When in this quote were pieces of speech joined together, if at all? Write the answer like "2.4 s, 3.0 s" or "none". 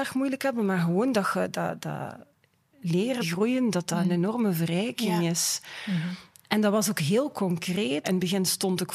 3.2 s, 8.0 s